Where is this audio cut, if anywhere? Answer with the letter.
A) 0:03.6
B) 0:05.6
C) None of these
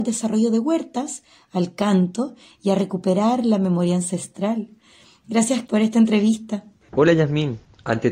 B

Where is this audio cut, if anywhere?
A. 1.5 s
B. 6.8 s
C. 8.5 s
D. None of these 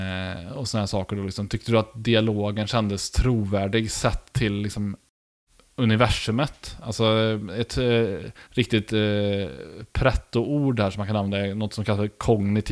C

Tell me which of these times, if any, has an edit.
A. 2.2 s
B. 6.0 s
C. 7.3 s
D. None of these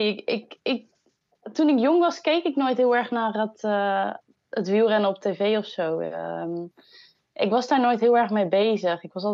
D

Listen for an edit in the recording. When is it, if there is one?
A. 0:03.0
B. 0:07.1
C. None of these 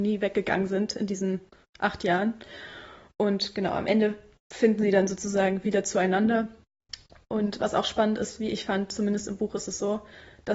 C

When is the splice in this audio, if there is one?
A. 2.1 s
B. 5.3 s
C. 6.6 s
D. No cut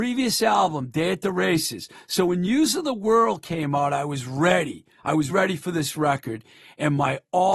B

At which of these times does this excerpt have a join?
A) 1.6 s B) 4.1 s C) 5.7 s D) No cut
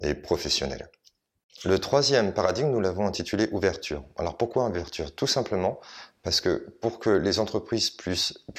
D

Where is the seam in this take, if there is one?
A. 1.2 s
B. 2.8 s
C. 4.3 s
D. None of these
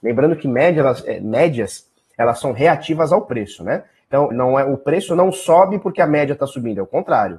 C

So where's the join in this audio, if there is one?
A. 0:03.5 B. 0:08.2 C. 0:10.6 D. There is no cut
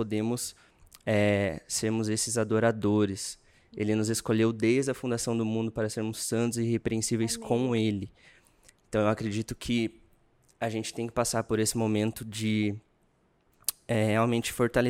D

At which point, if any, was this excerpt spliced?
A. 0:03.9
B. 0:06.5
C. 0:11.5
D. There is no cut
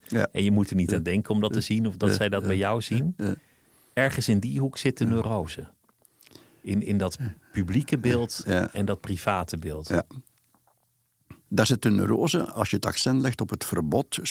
C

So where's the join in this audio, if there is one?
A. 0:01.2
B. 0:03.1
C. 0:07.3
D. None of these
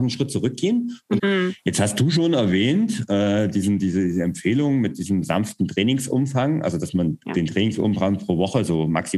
A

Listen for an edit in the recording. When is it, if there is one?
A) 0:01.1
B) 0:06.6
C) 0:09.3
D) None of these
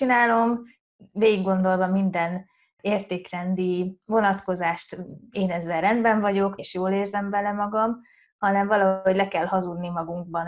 B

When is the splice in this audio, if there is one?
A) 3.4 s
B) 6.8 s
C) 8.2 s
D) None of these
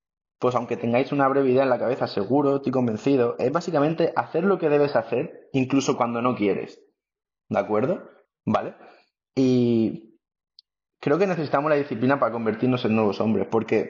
C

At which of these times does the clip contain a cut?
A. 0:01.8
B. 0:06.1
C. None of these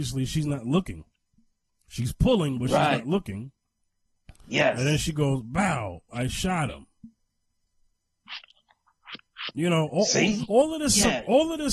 B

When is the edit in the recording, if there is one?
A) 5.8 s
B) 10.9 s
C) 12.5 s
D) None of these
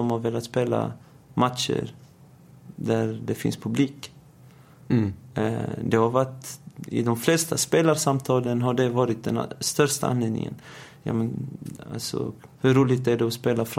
C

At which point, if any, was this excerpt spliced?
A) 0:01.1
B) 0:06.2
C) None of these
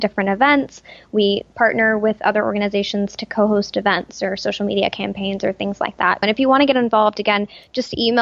B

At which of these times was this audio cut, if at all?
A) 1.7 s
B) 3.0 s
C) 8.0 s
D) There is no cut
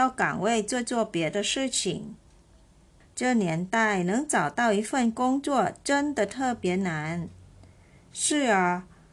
B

